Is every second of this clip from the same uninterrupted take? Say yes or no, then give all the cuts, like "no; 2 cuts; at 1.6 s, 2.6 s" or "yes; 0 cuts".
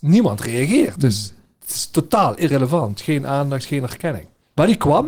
yes; 0 cuts